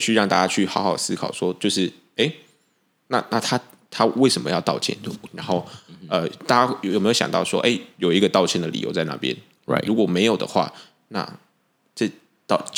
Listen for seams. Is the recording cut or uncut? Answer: cut